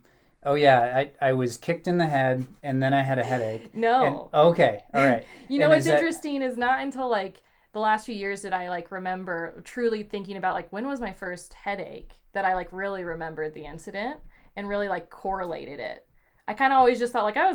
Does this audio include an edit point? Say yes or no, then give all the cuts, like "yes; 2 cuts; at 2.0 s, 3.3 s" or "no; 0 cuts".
no; 0 cuts